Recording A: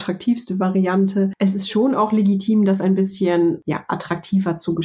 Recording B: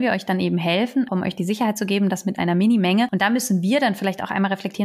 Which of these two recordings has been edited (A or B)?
B